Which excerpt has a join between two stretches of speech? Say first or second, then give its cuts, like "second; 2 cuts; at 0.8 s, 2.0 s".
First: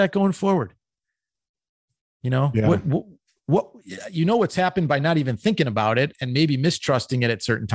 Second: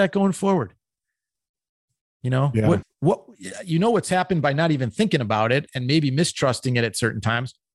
second; 1 cut; at 2.8 s